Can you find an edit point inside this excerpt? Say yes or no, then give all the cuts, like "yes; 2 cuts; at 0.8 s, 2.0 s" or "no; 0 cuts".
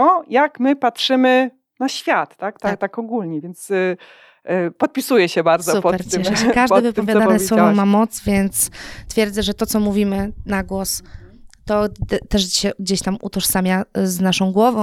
no; 0 cuts